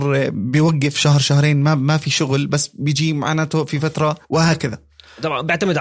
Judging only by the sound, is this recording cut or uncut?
cut